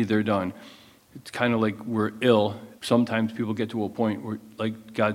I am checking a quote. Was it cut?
yes; 2 cuts; at 1.1 s, 2.8 s

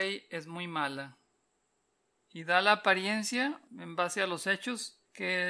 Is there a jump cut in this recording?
no; 0 cuts

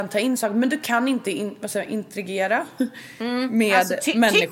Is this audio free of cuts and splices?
yes; 0 cuts

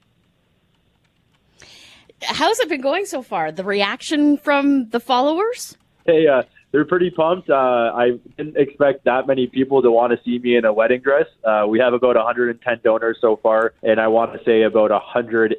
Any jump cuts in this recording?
yes; 2 cuts; at 6.1 s, 13.8 s

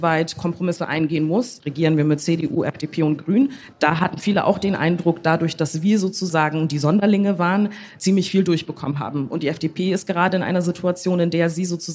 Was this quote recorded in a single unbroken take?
no; 1 cut; at 1.6 s

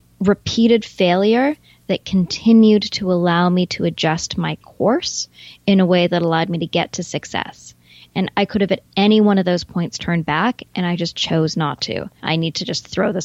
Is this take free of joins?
no; 1 cut; at 12.2 s

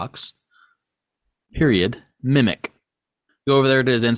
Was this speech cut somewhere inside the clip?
no; 0 cuts

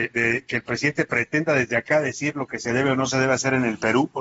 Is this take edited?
no; 0 cuts

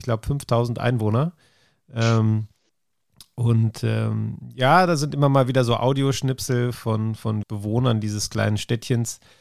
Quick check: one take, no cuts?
no; 1 cut; at 7.4 s

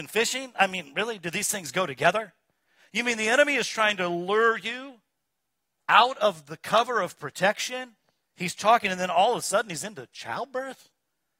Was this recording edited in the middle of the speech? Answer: no; 0 cuts

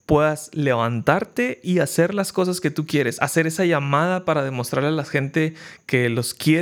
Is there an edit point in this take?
no; 0 cuts

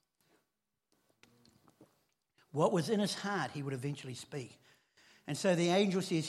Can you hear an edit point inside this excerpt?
no; 0 cuts

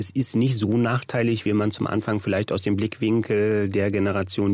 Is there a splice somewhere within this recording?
no; 0 cuts

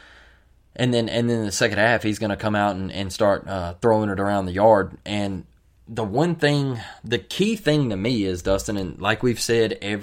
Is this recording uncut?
yes; 0 cuts

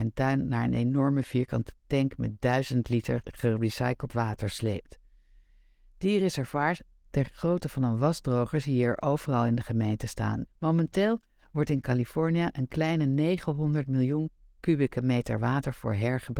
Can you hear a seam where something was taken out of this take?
yes; 1 cut; at 10.5 s

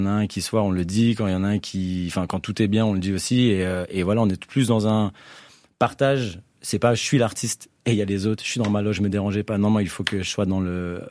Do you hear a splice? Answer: no; 0 cuts

